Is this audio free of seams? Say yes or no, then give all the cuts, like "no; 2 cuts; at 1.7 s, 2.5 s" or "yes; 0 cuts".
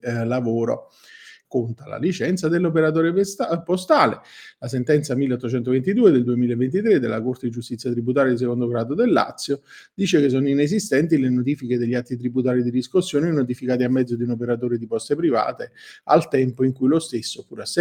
no; 1 cut; at 1.4 s